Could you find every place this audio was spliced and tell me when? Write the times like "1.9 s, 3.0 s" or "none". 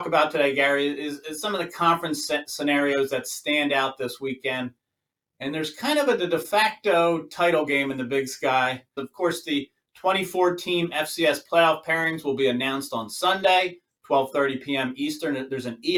9.0 s